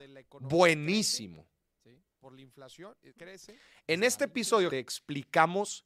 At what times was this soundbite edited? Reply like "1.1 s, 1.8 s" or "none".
3.1 s, 4.7 s